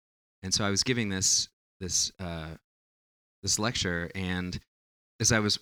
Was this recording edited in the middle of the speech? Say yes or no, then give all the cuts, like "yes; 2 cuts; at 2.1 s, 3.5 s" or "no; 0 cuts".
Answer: no; 0 cuts